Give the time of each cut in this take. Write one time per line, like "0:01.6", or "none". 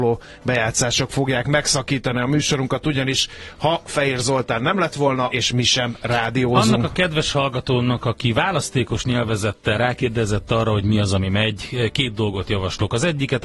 0:05.3

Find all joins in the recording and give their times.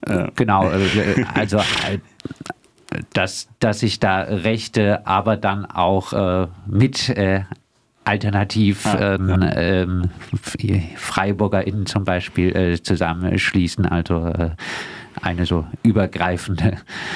none

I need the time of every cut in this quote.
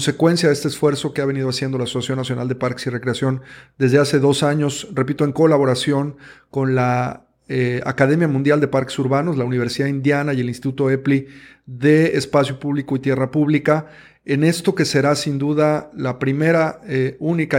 none

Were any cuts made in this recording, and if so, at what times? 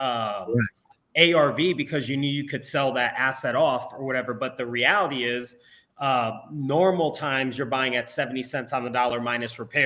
none

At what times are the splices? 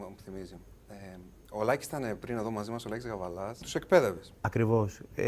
0:03.6

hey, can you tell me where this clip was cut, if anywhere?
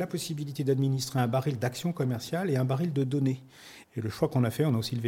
0:03.8

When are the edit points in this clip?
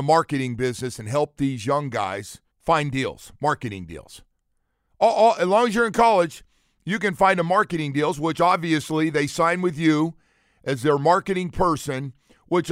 0:02.5

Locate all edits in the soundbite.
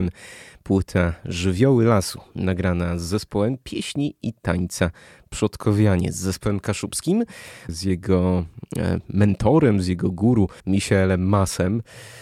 0:07.7
0:10.6

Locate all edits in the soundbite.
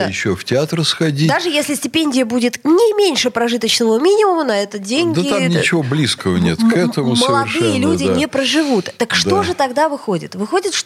none

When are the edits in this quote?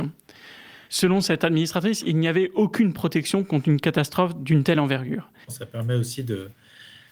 0:05.4

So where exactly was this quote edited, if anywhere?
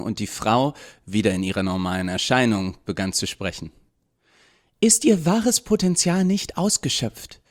none

